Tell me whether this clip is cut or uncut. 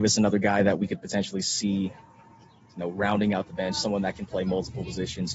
uncut